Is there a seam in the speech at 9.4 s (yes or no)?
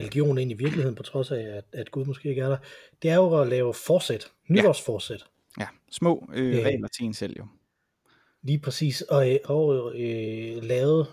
yes